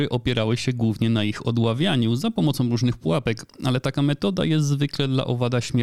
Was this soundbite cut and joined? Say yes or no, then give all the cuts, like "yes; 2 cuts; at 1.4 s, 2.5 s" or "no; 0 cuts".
no; 0 cuts